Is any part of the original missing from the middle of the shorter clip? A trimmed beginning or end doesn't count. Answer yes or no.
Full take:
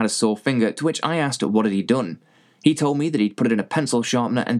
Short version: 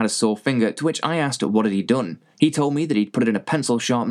yes